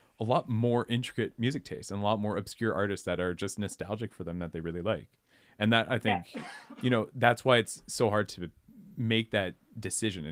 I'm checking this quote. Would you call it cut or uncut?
uncut